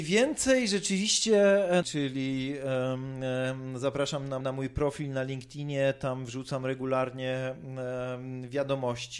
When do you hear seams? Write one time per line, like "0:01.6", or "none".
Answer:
0:01.8
0:04.4